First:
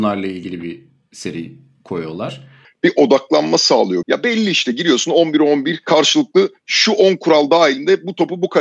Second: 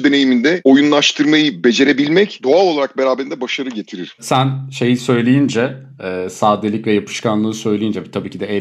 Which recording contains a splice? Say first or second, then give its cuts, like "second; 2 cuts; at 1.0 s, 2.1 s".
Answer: first; 2 cuts; at 2.6 s, 4.0 s